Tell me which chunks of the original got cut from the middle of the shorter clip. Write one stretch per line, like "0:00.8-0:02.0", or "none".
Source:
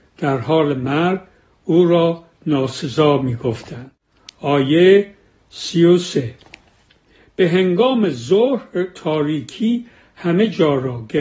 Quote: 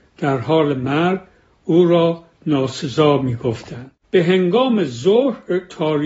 0:04.0-0:07.3